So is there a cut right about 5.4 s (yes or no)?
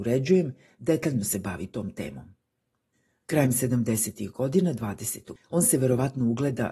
yes